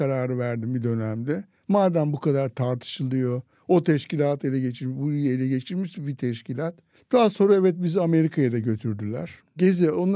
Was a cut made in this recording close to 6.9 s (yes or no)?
yes